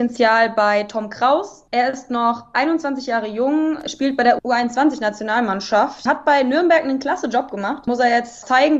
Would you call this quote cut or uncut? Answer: uncut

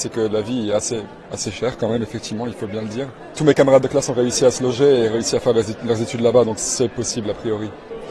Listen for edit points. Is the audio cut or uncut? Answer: uncut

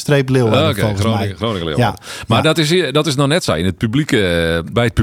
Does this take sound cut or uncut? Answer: uncut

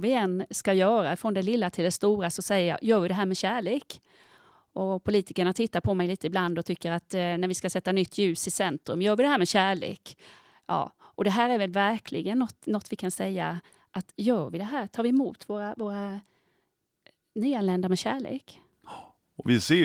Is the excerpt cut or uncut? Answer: uncut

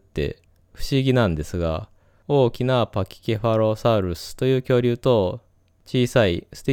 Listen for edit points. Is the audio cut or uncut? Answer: cut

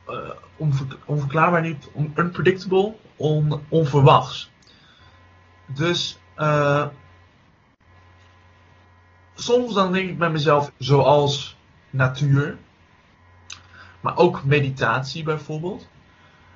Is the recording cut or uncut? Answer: cut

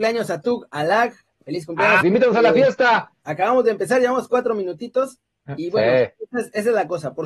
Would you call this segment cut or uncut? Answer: cut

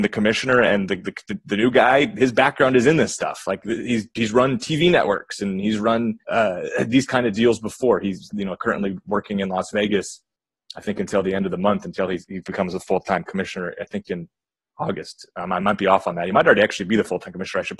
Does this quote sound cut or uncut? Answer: cut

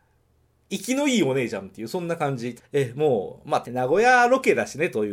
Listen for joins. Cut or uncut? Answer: cut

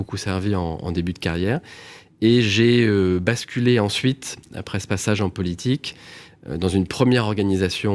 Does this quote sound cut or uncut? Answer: uncut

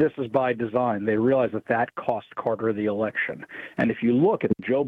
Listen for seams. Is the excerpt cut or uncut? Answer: uncut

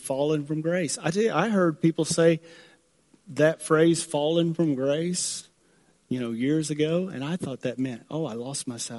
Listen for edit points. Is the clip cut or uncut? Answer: uncut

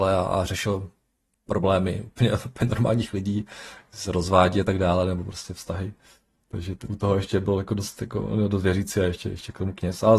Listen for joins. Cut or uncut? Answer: uncut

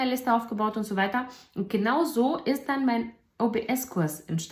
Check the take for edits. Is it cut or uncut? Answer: uncut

